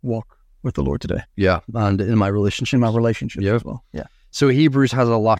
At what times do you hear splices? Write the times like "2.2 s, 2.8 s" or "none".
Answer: none